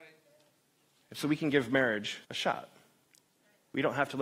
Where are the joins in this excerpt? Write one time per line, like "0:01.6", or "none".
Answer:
0:02.2